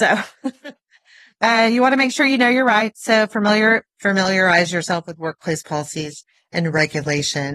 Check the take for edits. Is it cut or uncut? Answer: uncut